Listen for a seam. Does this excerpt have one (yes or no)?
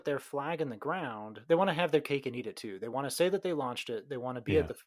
no